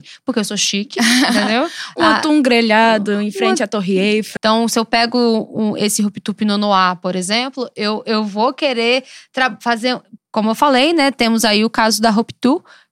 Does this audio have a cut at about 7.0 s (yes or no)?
no